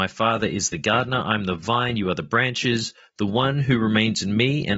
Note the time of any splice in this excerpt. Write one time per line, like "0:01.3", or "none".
none